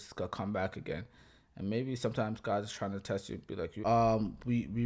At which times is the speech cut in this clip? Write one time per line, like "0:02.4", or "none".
0:03.8